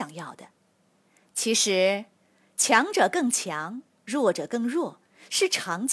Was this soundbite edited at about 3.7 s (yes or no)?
no